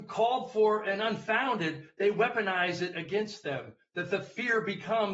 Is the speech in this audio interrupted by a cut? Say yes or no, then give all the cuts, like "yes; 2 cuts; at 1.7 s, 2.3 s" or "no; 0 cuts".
no; 0 cuts